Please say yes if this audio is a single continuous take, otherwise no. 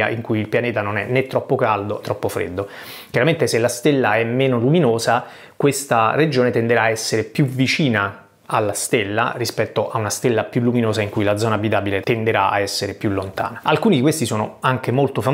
no